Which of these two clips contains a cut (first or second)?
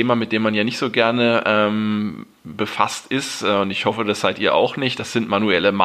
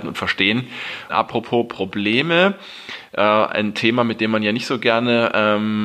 second